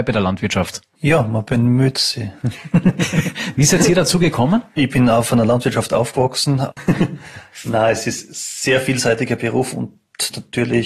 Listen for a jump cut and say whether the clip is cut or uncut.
cut